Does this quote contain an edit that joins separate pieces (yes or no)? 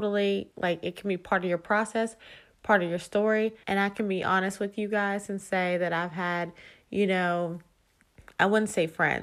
yes